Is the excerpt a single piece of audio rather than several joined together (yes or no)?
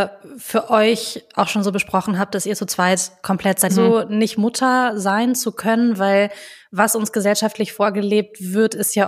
no